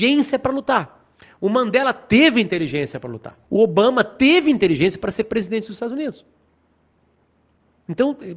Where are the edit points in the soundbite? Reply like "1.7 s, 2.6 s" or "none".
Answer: 3.4 s